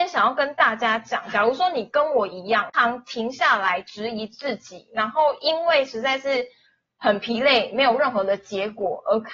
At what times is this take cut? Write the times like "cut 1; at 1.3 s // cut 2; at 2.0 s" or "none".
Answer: cut 1; at 2.7 s